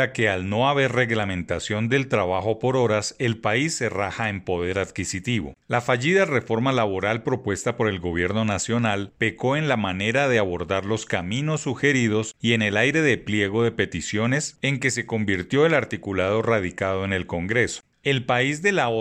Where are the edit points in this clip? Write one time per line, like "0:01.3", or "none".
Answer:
0:18.0